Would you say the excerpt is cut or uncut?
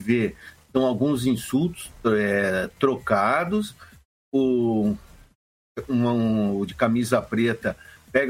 uncut